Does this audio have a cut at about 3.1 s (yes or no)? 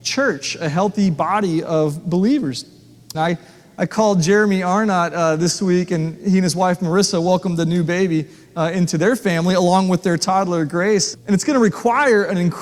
yes